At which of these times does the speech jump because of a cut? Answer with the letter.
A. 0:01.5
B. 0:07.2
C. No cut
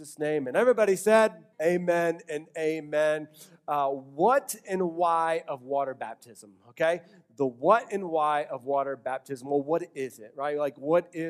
A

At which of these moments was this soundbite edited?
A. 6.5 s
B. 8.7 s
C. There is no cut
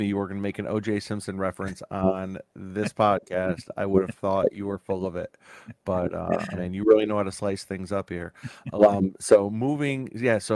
A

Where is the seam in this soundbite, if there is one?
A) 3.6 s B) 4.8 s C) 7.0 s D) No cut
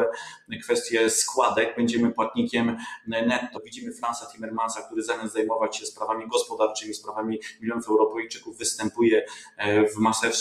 A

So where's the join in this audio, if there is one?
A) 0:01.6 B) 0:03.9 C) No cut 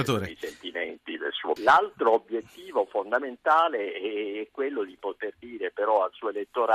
A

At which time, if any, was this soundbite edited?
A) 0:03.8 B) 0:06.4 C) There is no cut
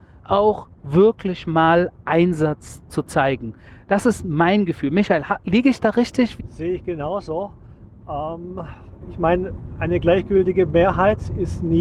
B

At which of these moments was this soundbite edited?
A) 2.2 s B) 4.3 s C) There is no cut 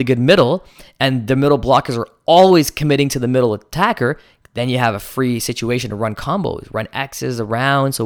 C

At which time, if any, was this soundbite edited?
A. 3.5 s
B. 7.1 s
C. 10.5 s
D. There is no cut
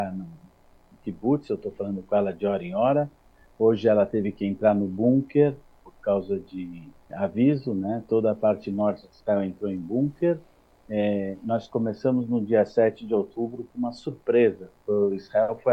B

